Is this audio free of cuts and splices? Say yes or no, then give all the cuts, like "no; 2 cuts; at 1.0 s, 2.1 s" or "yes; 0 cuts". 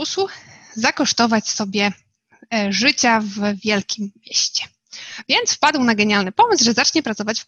yes; 0 cuts